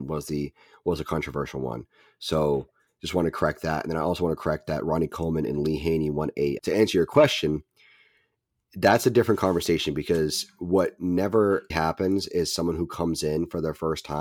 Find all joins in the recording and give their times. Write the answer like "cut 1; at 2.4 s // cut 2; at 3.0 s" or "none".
cut 1; at 6.6 s // cut 2; at 11.7 s

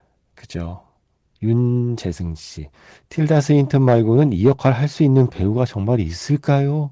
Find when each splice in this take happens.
cut 1; at 1.4 s

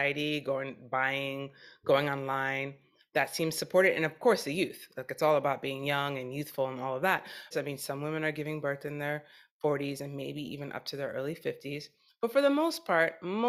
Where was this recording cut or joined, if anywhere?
cut 1; at 7.5 s

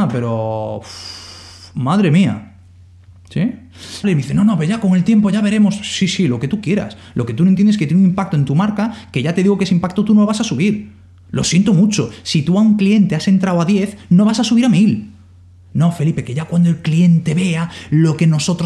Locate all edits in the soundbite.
cut 1; at 4.0 s

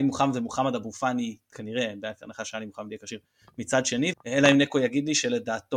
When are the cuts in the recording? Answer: cut 1; at 4.1 s

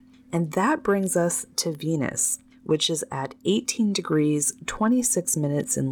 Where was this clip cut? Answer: none

